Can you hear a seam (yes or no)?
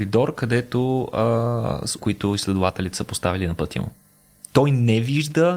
yes